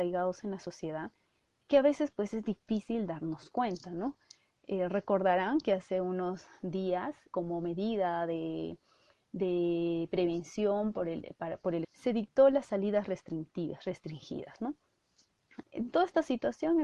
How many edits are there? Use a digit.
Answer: 3